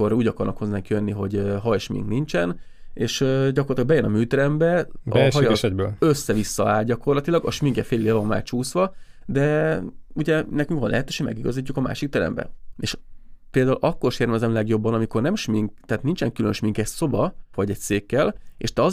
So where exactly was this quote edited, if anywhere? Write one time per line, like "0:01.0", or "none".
0:12.7
0:17.5